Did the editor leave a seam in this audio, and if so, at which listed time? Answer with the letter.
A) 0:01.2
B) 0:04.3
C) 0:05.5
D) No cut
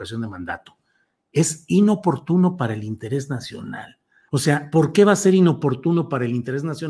B